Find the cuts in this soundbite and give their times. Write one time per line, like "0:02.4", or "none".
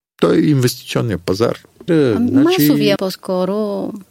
0:01.9
0:03.0